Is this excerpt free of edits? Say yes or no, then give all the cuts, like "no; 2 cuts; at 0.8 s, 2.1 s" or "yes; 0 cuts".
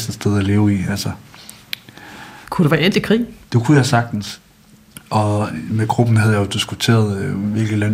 no; 1 cut; at 2.4 s